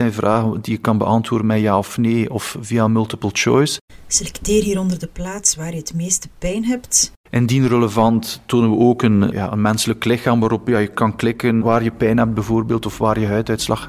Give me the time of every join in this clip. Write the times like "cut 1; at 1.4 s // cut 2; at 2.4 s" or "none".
cut 1; at 9.3 s